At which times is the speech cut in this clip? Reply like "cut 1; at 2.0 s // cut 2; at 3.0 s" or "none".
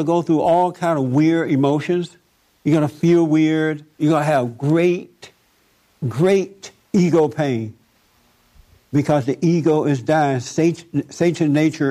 cut 1; at 4.0 s